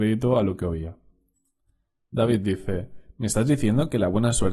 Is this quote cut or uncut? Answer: uncut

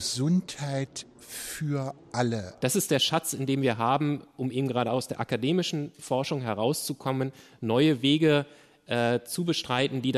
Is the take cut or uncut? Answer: cut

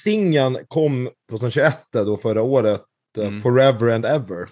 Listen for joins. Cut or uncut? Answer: uncut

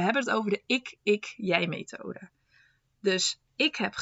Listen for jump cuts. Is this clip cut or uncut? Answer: uncut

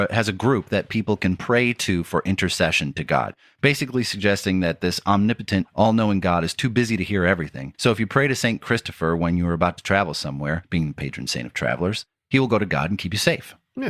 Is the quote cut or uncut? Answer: cut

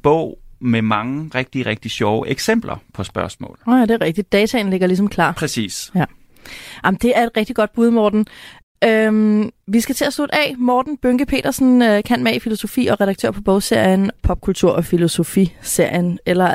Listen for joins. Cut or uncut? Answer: uncut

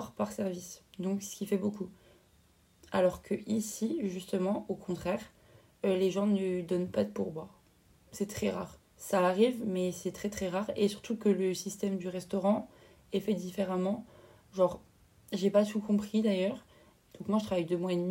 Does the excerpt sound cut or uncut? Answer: cut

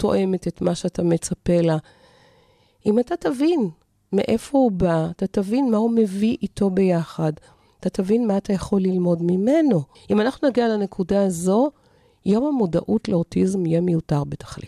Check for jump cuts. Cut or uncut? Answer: cut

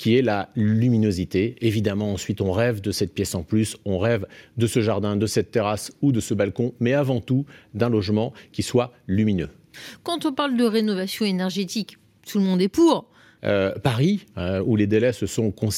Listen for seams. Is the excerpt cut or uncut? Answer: cut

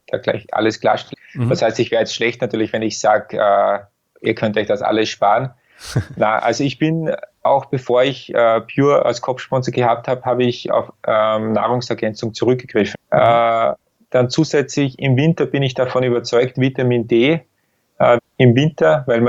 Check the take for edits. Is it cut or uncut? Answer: cut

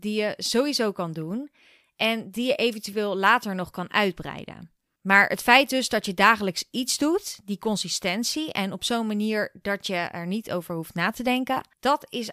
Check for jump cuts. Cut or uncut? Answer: uncut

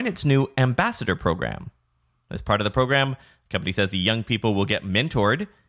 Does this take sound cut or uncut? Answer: uncut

